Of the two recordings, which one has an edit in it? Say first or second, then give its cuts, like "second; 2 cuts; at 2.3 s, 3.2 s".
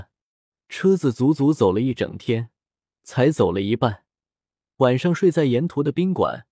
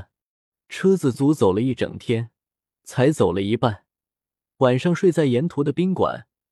second; 1 cut; at 1.1 s